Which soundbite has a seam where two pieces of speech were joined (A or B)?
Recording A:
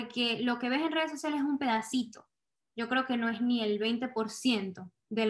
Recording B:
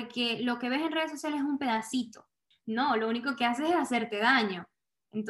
B